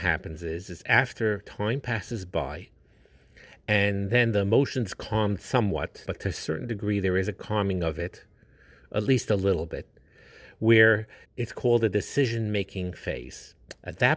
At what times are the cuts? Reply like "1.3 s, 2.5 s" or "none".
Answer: 6.1 s, 11.2 s